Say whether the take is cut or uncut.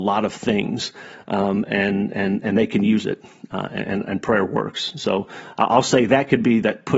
uncut